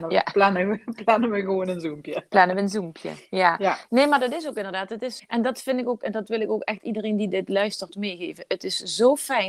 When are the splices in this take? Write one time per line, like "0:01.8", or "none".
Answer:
0:05.2